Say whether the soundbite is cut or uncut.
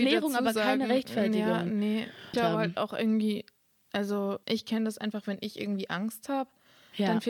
cut